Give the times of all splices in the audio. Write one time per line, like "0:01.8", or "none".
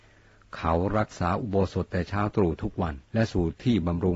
0:03.0